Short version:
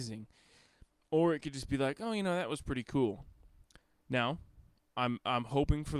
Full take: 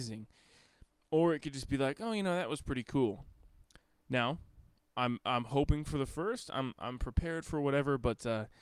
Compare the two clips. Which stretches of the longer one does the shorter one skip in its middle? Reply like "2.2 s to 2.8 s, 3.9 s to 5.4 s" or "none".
none